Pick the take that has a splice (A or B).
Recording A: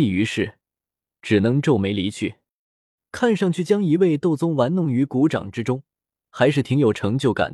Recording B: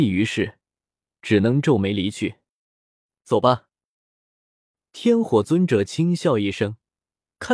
A